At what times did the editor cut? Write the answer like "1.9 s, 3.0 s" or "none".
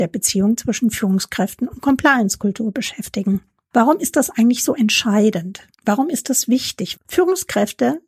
7.0 s